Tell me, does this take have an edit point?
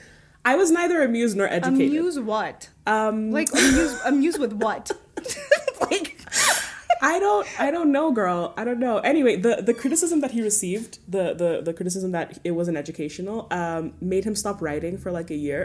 no; 0 cuts

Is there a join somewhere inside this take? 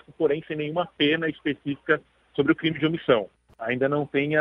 yes; 1 cut; at 3.5 s

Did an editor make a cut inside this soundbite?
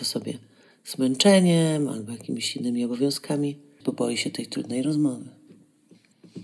yes; 1 cut; at 3.8 s

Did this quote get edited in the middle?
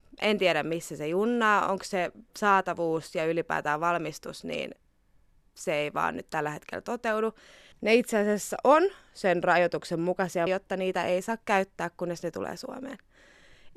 yes; 2 cuts; at 7.7 s, 10.5 s

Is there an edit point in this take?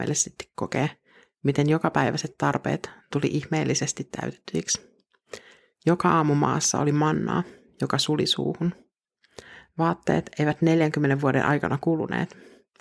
no; 0 cuts

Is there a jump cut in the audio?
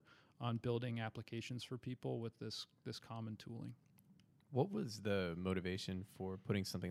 no; 0 cuts

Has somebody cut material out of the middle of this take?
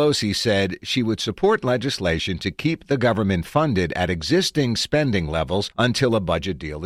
no; 0 cuts

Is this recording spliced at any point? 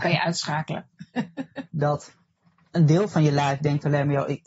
yes; 1 cut; at 1.7 s

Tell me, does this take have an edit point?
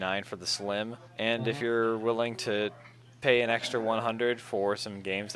yes; 1 cut; at 1.1 s

